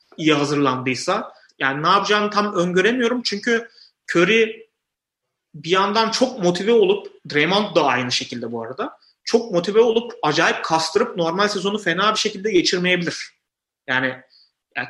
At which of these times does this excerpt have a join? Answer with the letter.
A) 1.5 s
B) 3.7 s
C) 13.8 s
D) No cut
A